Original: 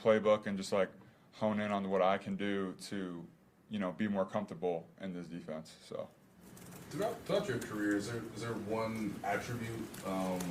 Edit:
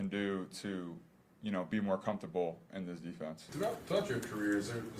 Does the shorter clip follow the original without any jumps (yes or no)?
no